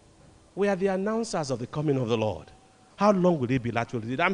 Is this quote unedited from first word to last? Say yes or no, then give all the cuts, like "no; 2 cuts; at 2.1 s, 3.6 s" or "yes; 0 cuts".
no; 1 cut; at 2.9 s